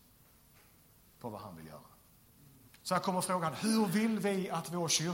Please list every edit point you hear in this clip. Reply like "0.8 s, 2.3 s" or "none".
2.8 s